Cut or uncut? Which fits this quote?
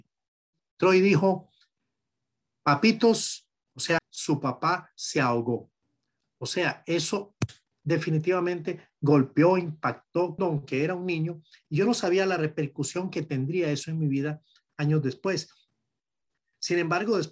cut